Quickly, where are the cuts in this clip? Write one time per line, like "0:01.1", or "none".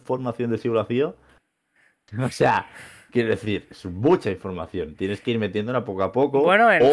0:01.8